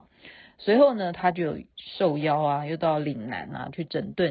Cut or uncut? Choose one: uncut